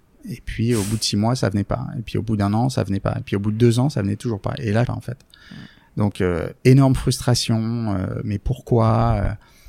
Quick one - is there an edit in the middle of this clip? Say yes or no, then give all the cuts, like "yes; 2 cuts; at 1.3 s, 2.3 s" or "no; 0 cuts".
yes; 2 cuts; at 3.2 s, 4.9 s